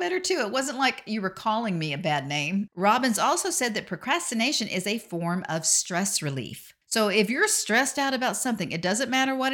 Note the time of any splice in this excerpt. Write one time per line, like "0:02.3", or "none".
0:02.7